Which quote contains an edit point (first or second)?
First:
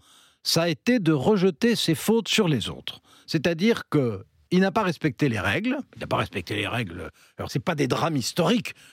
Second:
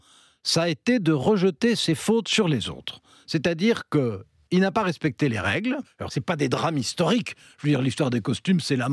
second